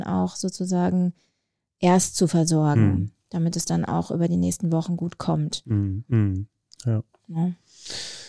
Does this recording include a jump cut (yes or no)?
yes